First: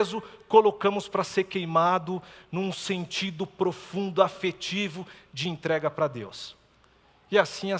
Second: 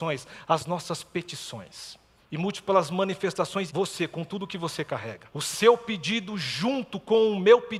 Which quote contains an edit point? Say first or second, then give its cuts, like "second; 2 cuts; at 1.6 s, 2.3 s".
second; 3 cuts; at 2.2 s, 3.7 s, 5.3 s